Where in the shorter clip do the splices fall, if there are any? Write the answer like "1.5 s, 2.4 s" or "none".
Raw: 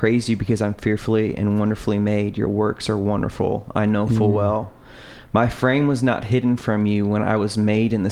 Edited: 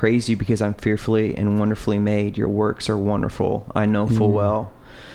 none